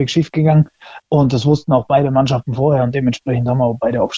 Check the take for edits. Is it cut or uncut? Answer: cut